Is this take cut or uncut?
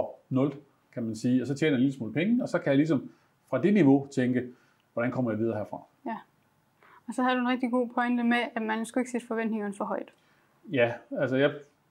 uncut